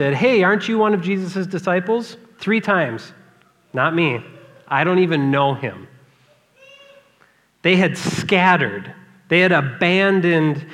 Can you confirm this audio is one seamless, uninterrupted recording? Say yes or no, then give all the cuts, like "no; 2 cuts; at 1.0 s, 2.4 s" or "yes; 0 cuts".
yes; 0 cuts